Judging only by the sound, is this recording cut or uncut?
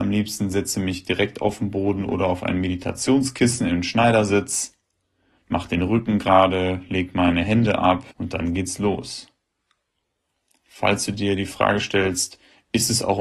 cut